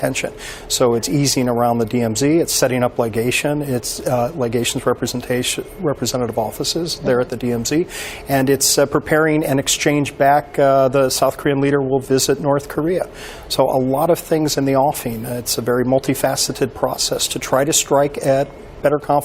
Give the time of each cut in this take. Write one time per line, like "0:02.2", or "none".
none